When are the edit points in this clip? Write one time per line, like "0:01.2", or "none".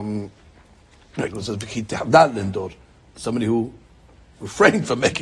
0:01.3